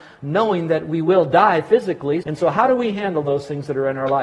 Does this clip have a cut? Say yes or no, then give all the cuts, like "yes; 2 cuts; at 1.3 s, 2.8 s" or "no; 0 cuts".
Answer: yes; 1 cut; at 2.2 s